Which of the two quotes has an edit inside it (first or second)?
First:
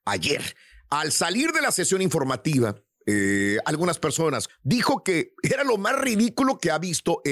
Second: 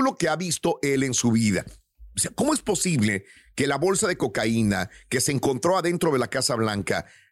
first